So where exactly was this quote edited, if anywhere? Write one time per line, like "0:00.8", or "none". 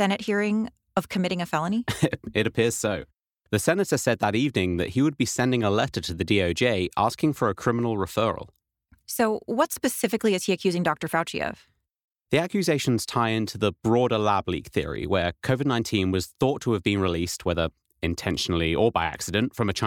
none